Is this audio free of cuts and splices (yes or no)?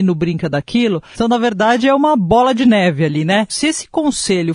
no